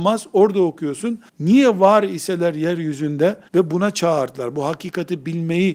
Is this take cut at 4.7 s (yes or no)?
no